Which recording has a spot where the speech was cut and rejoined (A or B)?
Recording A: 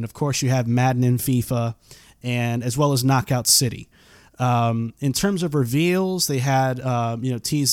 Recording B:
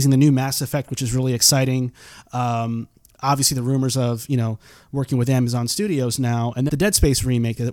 B